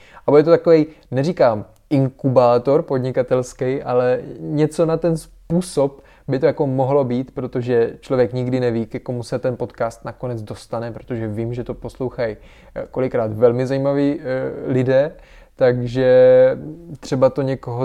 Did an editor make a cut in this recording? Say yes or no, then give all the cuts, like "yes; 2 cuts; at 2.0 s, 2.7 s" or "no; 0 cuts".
no; 0 cuts